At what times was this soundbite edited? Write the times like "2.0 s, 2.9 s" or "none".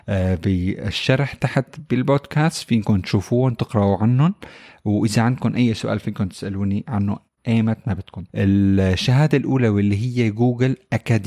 8.3 s